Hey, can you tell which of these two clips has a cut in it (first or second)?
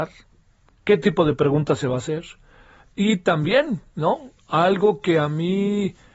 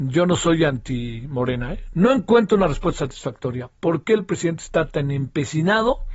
second